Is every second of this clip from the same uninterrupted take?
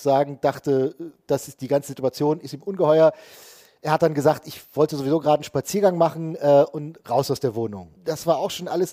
no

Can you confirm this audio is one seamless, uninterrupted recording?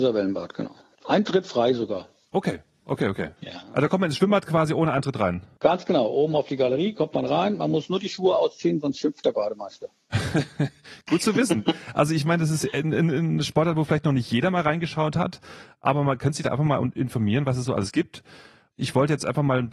yes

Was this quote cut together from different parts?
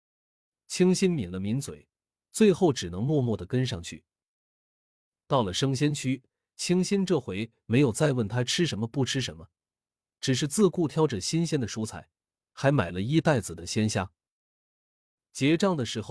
no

